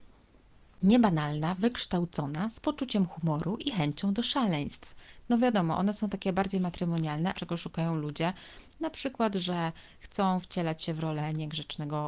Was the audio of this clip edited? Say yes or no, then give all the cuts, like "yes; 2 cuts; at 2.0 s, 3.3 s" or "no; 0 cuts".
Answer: yes; 2 cuts; at 5.3 s, 7.3 s